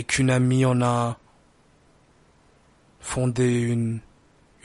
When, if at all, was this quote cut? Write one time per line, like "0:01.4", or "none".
none